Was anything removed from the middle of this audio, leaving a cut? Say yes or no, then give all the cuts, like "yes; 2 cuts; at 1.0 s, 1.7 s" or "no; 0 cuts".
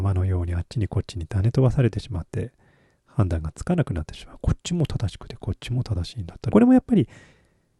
yes; 1 cut; at 6.5 s